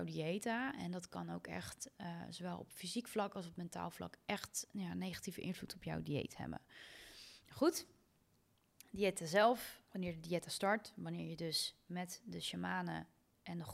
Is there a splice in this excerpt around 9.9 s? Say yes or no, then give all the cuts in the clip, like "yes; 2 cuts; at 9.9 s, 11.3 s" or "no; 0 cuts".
yes; 1 cut; at 9.9 s